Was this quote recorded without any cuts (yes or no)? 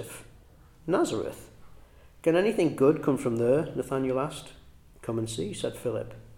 yes